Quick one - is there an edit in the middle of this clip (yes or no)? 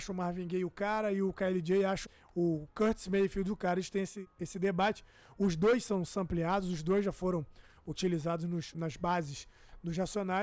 no